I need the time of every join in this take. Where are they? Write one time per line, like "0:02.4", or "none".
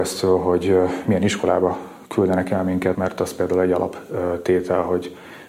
0:02.9